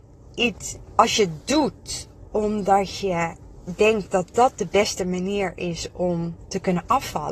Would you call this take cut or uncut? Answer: uncut